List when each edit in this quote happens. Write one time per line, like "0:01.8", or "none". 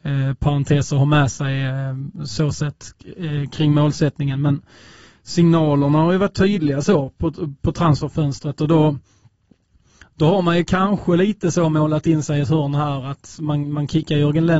none